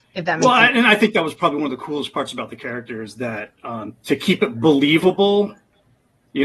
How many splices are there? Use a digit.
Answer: 0